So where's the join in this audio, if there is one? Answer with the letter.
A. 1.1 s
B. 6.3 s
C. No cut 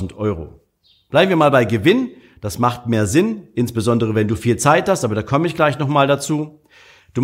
A